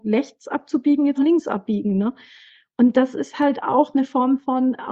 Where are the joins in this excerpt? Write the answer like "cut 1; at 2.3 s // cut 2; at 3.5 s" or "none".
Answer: cut 1; at 1.1 s